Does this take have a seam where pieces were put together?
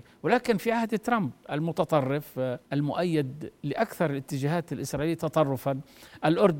yes; 1 cut; at 2.6 s

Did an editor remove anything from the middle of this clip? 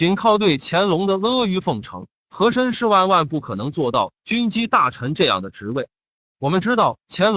no; 0 cuts

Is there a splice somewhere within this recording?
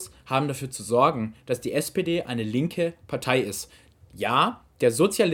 no; 0 cuts

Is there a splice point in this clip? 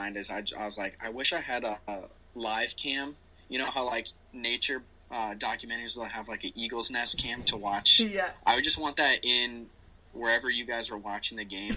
no; 0 cuts

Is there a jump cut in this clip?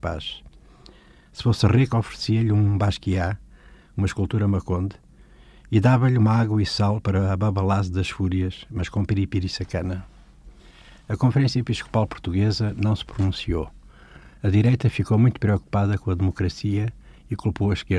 no; 0 cuts

